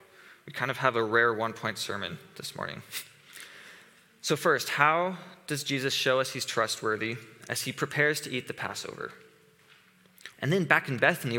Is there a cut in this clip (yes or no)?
yes